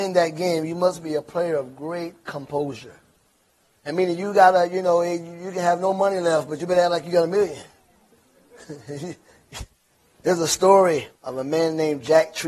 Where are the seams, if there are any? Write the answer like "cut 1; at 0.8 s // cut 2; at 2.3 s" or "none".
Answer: cut 1; at 11.1 s